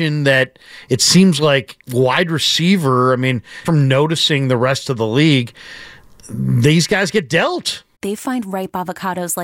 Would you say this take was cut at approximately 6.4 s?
no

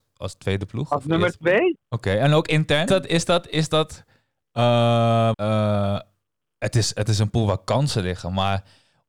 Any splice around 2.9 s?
yes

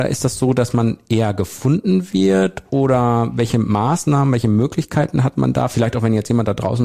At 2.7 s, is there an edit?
no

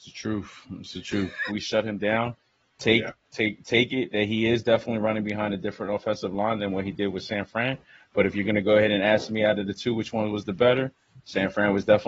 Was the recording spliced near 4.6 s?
no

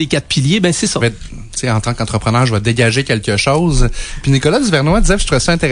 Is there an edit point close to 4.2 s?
no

